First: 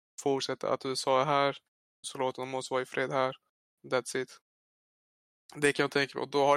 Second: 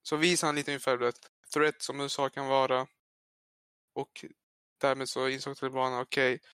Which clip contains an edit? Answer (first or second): first